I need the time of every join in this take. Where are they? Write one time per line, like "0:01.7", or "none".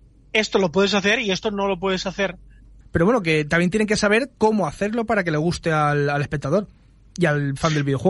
0:02.8

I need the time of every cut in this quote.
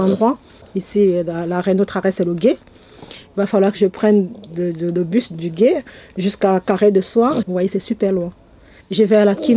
0:07.4

